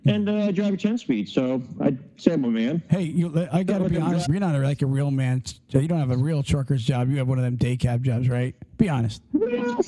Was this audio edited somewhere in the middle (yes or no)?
yes